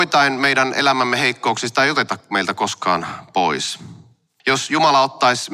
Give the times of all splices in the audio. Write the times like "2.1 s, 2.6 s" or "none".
4.4 s